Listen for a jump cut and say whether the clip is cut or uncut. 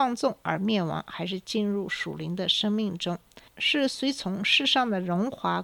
uncut